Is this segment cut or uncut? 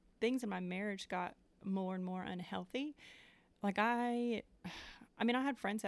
uncut